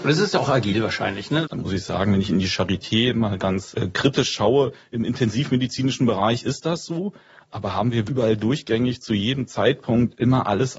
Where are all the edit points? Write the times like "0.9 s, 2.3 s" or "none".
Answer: 1.4 s, 3.7 s, 8.1 s